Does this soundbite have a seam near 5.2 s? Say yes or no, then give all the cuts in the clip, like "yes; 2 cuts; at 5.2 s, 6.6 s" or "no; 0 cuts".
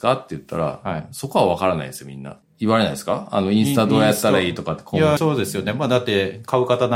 yes; 2 cuts; at 2.4 s, 5.2 s